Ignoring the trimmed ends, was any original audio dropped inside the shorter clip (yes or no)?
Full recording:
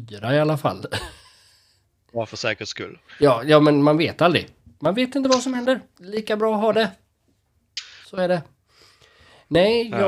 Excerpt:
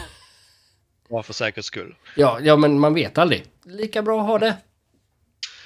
yes